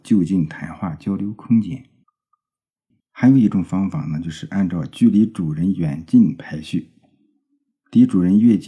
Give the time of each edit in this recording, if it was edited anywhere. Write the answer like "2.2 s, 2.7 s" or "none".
3.0 s